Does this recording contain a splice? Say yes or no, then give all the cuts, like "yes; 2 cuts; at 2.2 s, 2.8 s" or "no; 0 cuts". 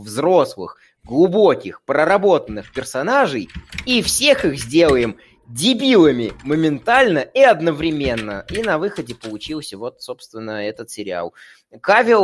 no; 0 cuts